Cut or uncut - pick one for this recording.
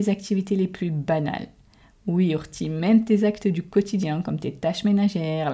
uncut